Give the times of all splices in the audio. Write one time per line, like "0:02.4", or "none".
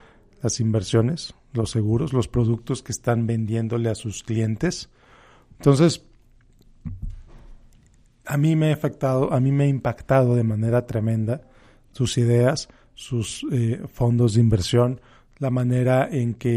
0:05.5